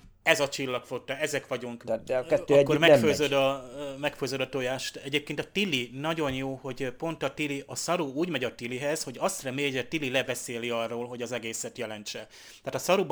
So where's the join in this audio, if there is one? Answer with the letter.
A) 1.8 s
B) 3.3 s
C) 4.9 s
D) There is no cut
A